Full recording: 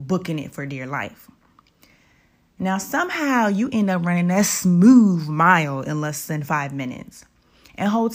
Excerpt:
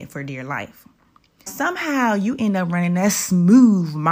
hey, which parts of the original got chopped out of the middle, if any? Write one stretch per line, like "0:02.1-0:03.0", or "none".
0:01.9-0:02.8